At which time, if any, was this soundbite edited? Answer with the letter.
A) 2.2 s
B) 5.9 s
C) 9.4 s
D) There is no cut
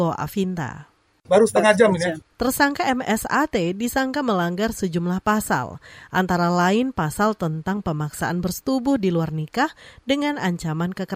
A